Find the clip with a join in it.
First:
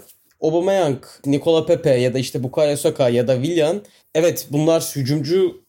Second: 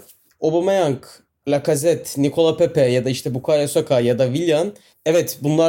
first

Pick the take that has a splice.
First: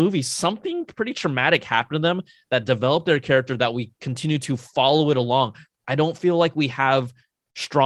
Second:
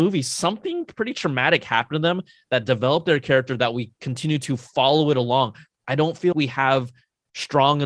second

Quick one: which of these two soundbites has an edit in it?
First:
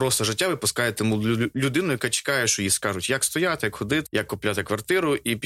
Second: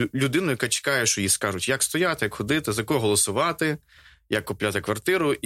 first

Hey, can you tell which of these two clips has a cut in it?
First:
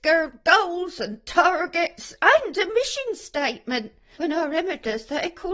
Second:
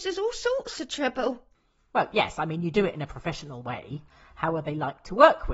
first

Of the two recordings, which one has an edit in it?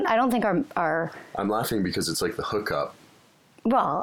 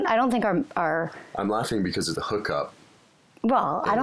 second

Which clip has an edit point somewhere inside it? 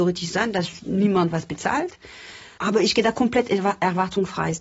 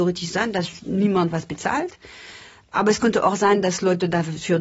first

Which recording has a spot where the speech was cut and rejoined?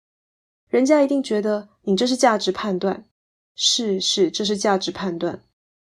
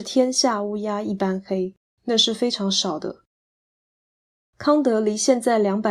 second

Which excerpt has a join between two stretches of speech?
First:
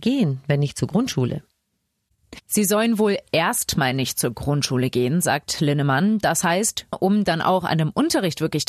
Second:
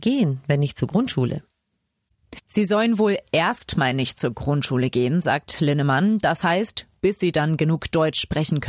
first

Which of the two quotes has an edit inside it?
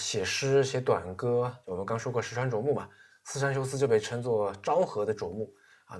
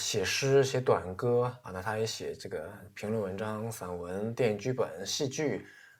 second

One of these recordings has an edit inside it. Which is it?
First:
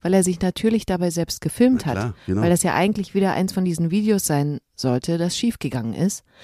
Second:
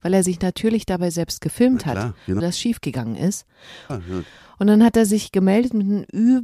second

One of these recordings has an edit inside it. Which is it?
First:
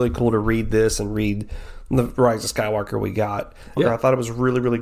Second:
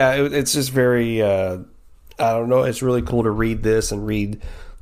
first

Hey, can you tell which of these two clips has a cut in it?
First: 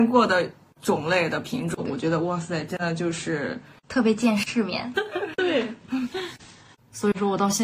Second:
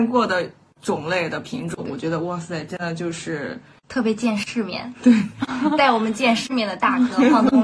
first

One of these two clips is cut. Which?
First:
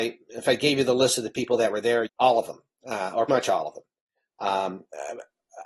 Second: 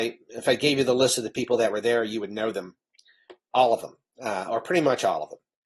first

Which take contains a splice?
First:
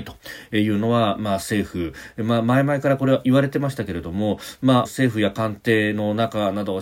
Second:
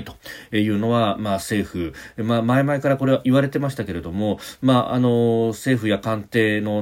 first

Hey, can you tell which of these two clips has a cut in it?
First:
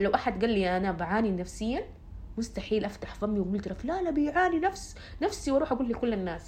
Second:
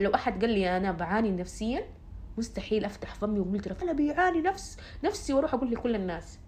second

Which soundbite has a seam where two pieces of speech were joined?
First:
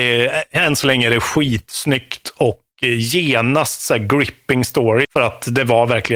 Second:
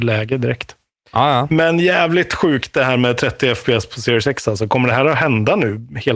first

